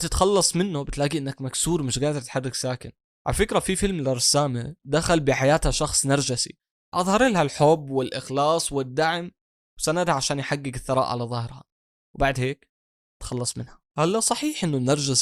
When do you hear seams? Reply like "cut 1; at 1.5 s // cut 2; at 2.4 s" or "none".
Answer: cut 1; at 13.9 s